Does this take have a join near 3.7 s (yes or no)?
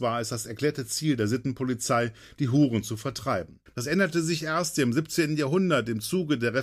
yes